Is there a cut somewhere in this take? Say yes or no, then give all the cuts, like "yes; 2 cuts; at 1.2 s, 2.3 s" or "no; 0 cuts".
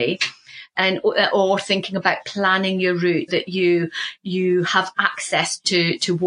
yes; 1 cut; at 3.3 s